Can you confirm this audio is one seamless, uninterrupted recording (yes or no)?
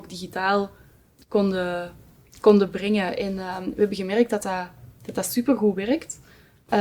yes